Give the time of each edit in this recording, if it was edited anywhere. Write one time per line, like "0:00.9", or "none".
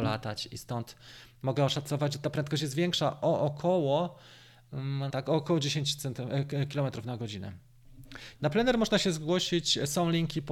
0:05.1
0:08.4